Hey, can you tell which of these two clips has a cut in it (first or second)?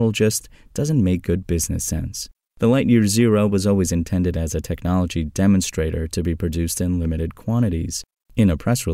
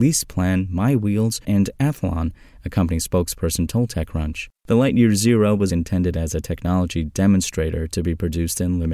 second